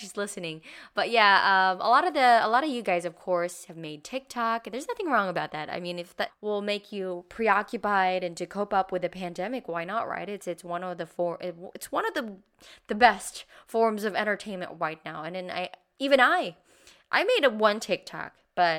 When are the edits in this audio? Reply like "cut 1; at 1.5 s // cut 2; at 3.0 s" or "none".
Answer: cut 1; at 6.3 s